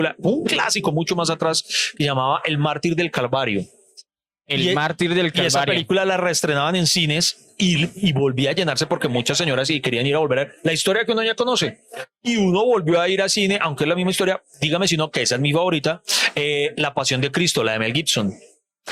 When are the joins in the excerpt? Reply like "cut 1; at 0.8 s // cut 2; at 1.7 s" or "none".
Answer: none